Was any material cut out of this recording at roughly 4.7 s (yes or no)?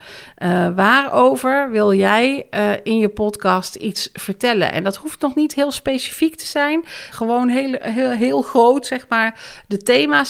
no